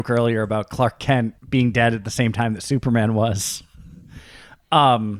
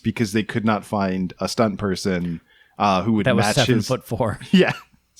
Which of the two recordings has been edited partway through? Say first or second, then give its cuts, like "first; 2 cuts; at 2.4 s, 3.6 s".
first; 1 cut; at 1.4 s